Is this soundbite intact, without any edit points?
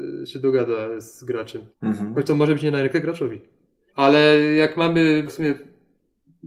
no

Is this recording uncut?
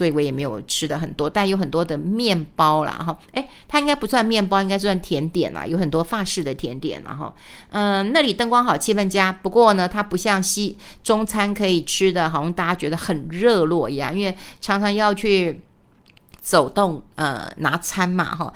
yes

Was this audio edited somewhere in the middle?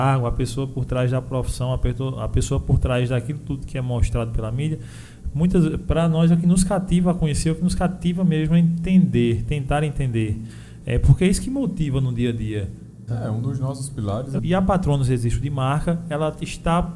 yes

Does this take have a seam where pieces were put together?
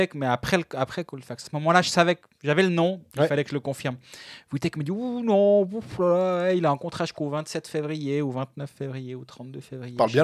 no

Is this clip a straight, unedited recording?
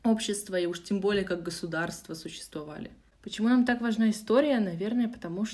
no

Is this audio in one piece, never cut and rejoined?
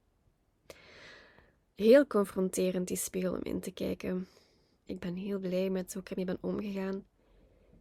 no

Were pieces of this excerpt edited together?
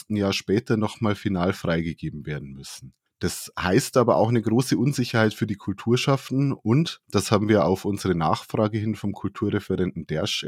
yes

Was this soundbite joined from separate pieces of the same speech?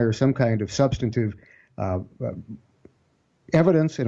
no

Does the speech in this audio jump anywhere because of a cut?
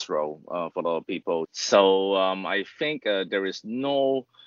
yes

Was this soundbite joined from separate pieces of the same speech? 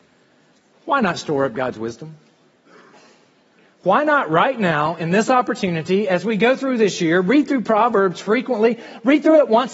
yes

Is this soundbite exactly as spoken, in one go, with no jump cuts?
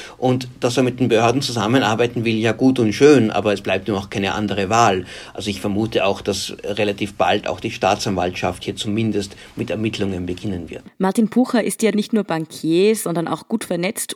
no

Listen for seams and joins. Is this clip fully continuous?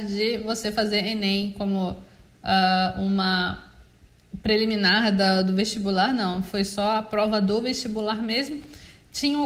yes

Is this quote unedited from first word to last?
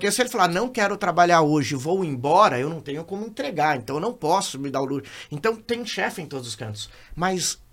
yes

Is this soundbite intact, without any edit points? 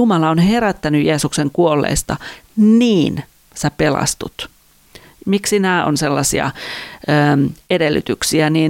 no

